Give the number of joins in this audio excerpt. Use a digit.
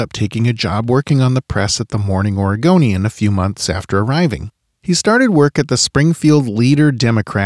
1